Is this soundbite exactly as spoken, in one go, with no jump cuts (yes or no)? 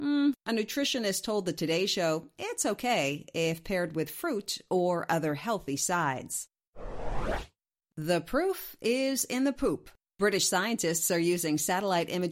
yes